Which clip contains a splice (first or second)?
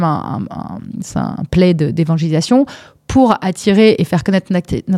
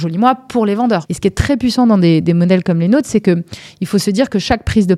second